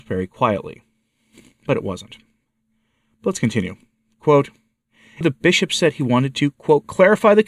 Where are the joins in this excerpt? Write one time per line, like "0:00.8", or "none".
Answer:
0:05.2